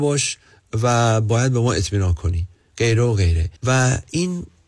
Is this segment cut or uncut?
cut